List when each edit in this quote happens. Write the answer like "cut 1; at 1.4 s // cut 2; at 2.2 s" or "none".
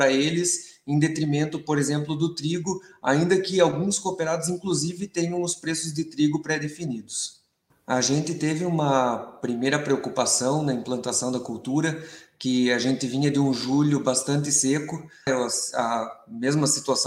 cut 1; at 7.7 s // cut 2; at 15.3 s